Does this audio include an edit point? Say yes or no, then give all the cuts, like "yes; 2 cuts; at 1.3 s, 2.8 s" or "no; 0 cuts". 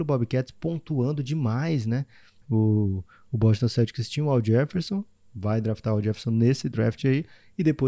yes; 1 cut; at 2.4 s